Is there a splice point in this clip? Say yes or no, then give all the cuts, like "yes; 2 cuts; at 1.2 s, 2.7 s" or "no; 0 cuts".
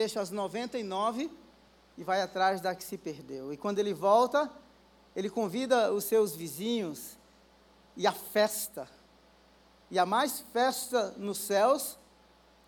no; 0 cuts